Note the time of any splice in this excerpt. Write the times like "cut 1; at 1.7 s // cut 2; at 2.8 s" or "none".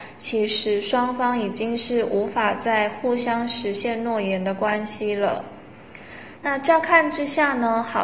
cut 1; at 6.4 s